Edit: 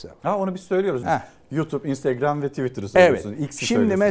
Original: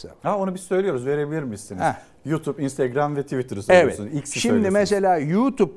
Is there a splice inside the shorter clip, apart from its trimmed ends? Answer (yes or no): yes